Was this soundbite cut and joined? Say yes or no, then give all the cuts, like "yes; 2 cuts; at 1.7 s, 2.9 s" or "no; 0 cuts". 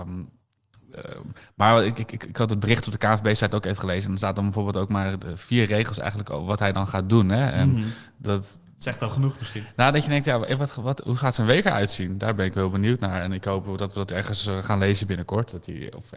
no; 0 cuts